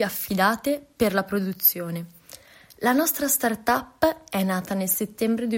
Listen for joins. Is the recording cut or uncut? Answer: uncut